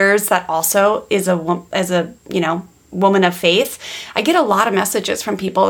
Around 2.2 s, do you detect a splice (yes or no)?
no